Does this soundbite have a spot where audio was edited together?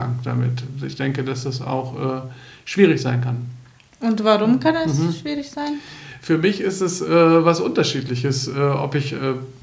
no; 0 cuts

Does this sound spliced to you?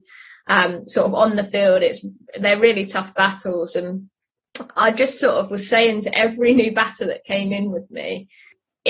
no; 0 cuts

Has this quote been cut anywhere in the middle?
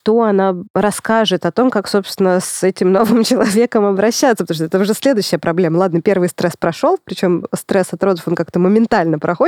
no; 0 cuts

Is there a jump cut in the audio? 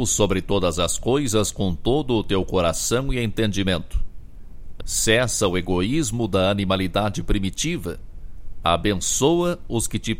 yes; 2 cuts; at 4.8 s, 8.6 s

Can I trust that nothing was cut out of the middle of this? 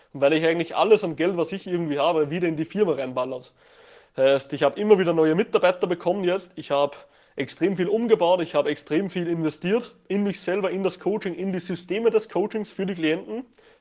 yes; 0 cuts

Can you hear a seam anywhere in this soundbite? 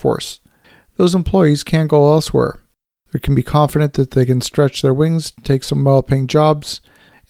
no; 0 cuts

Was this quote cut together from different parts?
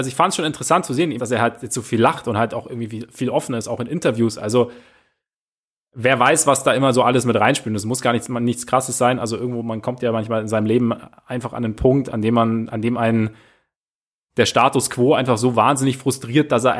yes; 1 cut; at 1.2 s

